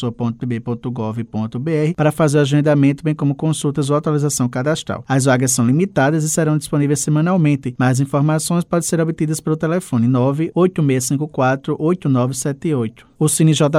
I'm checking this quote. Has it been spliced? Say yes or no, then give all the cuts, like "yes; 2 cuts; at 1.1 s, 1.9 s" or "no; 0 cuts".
no; 0 cuts